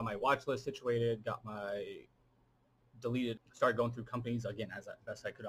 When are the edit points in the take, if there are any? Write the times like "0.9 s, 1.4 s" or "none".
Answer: 3.4 s